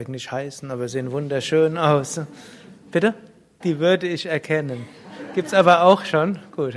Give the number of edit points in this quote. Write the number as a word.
one